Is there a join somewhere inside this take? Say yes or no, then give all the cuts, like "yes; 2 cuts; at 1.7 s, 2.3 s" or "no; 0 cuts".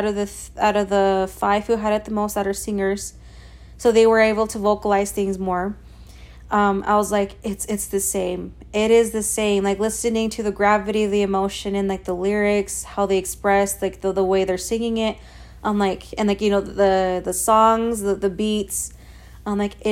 no; 0 cuts